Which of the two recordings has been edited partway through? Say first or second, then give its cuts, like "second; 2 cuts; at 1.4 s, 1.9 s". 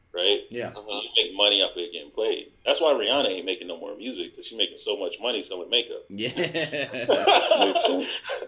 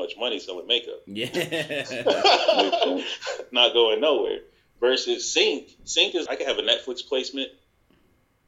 second; 1 cut; at 6.3 s